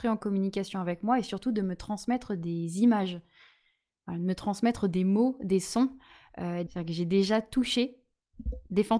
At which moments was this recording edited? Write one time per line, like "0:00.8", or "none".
0:06.7